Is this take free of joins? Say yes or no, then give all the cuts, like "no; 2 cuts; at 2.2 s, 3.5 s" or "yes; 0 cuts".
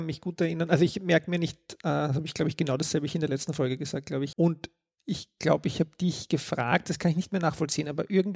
no; 2 cuts; at 4.3 s, 6.9 s